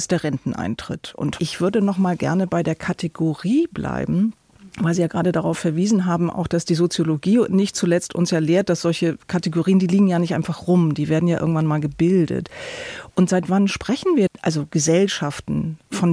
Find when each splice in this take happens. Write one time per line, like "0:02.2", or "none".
0:01.4